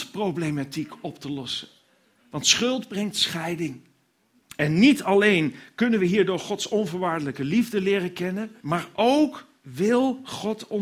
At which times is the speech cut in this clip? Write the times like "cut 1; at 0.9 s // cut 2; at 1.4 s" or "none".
cut 1; at 4.4 s // cut 2; at 8.6 s